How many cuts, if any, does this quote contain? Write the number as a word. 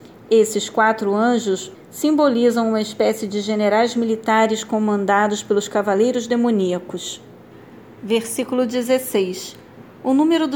one